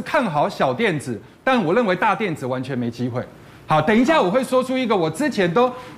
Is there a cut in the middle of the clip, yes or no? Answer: no